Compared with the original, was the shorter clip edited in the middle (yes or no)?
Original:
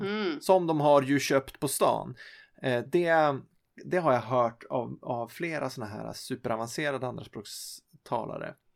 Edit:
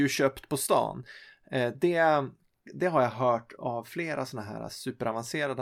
yes